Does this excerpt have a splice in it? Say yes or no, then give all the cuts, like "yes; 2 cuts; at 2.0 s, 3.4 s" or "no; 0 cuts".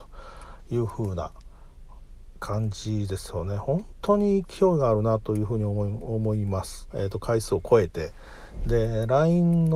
yes; 1 cut; at 6.9 s